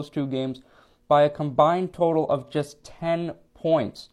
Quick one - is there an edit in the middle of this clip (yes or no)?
no